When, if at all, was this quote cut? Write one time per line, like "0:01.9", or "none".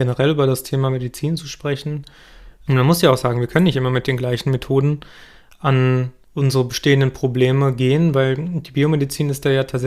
0:02.7
0:06.2